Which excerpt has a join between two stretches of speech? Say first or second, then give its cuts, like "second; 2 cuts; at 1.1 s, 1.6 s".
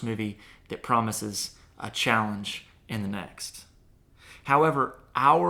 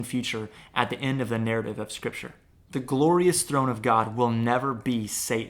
second; 1 cut; at 2.6 s